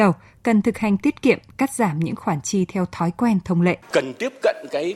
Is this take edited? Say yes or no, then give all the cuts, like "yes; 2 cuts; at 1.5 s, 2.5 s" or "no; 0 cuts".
yes; 1 cut; at 3.8 s